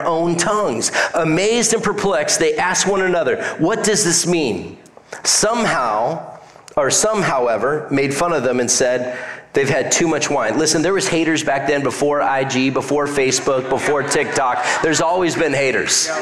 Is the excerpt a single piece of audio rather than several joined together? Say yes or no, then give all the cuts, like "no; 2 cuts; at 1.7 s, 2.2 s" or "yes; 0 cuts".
yes; 0 cuts